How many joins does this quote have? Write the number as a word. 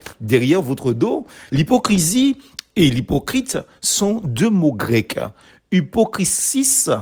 one